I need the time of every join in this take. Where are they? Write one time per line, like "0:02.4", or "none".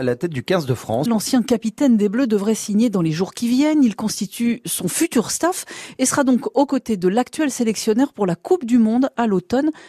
0:01.1

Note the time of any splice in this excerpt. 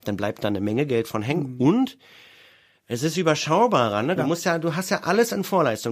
0:04.2

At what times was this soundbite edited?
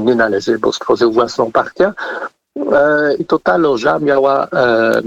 0:03.2

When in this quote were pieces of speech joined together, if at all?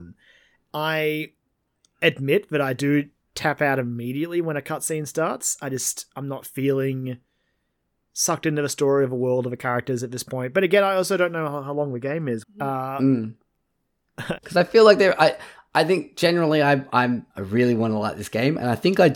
0:12.4
0:14.4
0:17.3

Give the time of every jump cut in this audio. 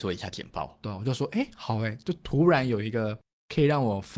none

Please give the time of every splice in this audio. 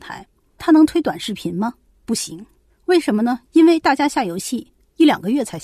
0:03.4

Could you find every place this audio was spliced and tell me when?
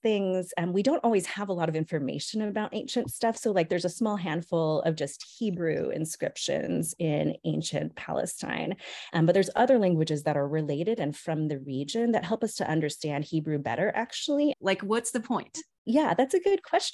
0:09.1
0:14.5

